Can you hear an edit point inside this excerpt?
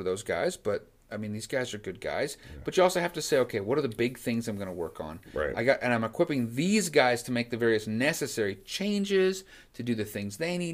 no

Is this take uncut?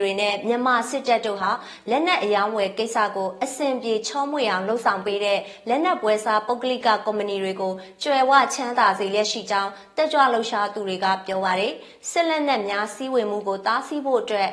yes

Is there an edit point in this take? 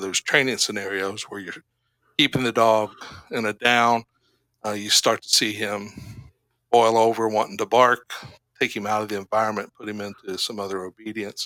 no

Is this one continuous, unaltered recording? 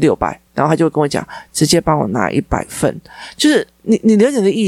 yes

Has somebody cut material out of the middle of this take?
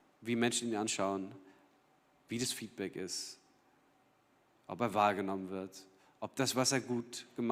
no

